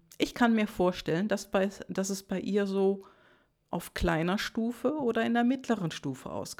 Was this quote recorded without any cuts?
yes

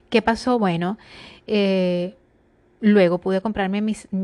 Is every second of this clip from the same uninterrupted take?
yes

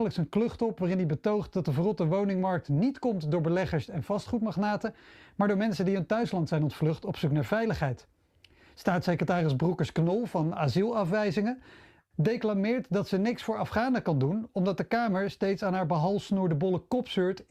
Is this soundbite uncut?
yes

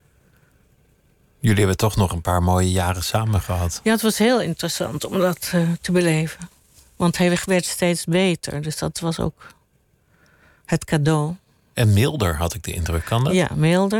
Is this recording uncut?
yes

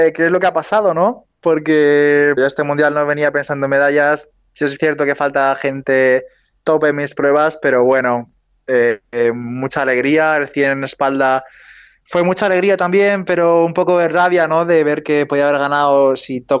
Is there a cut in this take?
yes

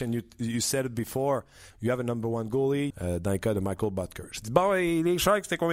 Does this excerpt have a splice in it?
yes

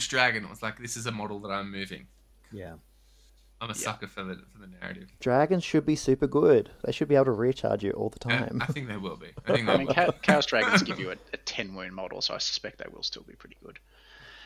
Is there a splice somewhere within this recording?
no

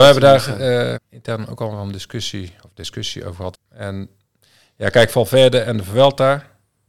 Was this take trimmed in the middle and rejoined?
yes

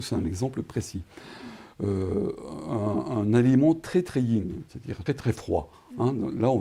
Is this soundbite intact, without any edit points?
no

